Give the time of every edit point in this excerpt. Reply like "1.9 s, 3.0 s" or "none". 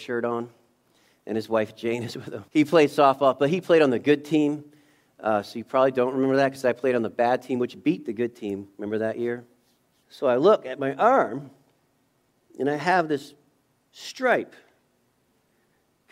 2.5 s, 10.0 s